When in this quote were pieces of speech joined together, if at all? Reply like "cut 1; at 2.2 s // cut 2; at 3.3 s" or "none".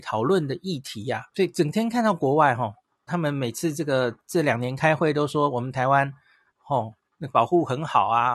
cut 1; at 1.3 s // cut 2; at 3.1 s